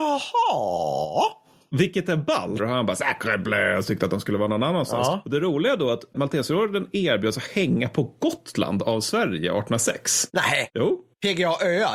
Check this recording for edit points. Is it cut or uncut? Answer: cut